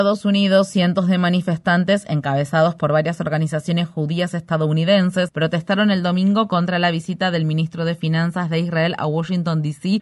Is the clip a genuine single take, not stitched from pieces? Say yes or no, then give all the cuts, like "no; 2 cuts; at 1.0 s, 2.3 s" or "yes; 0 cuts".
yes; 0 cuts